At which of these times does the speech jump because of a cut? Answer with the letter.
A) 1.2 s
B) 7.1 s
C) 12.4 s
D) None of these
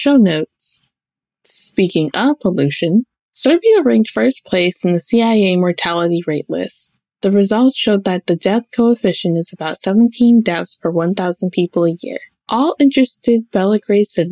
C